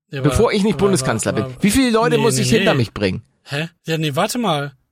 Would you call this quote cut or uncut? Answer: cut